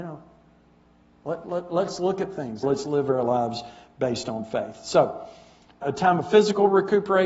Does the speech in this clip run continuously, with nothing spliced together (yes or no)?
no